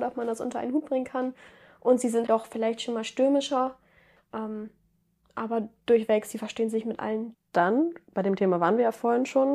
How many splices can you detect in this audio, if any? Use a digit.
3